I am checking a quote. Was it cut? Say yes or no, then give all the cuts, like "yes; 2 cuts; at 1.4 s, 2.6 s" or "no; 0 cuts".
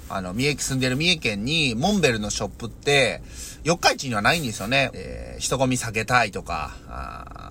yes; 1 cut; at 4.9 s